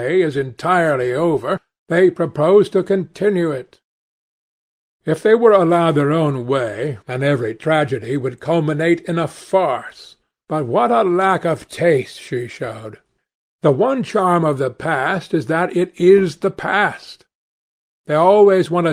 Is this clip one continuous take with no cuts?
no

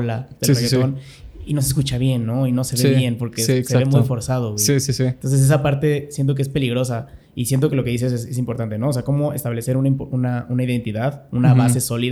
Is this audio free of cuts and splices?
yes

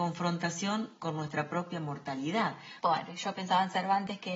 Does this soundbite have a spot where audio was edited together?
yes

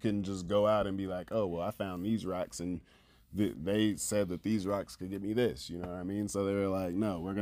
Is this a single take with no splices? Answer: yes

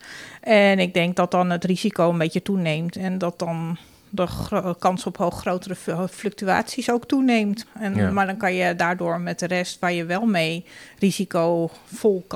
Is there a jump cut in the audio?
yes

